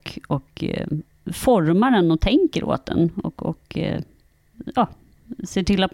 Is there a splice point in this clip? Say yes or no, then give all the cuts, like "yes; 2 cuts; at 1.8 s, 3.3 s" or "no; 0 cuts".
no; 0 cuts